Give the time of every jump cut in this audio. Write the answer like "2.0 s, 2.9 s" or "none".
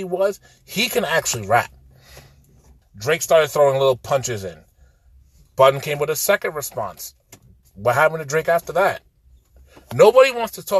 2.8 s